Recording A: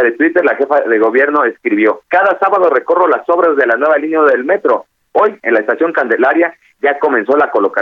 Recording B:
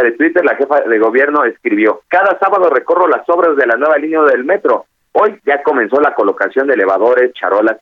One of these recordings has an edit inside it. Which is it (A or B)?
B